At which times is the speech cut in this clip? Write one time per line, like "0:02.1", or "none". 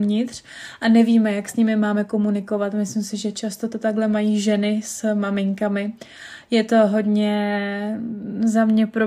none